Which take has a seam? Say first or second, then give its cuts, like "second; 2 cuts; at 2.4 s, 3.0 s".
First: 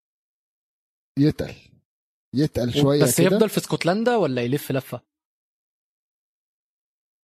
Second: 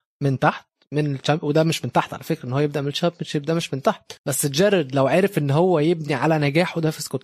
second; 1 cut; at 4.2 s